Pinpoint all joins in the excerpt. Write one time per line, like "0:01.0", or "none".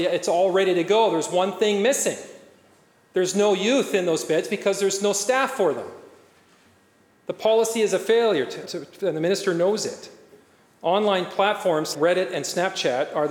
0:08.7
0:11.9